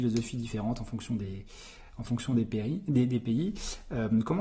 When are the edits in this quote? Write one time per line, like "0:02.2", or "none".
none